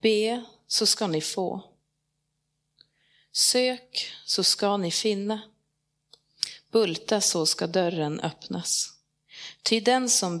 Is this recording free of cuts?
yes; 0 cuts

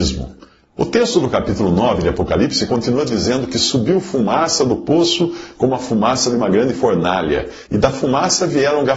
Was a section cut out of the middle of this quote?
yes; 1 cut; at 7.7 s

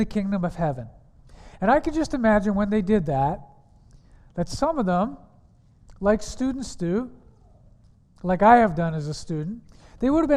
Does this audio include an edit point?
no; 0 cuts

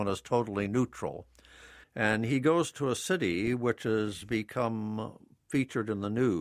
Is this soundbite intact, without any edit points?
no; 1 cut; at 1.8 s

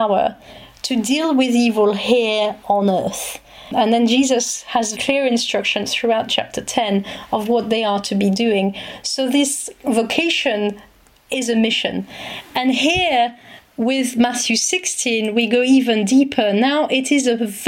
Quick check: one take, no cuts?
no; 1 cut; at 5.0 s

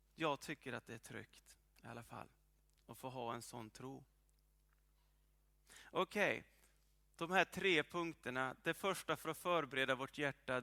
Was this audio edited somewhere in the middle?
no; 0 cuts

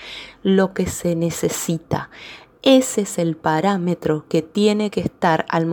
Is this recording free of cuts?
yes; 0 cuts

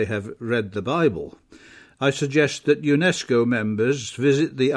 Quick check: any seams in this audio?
no; 0 cuts

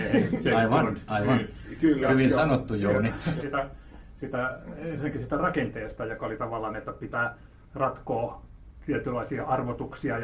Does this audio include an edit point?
yes; 1 cut; at 3.4 s

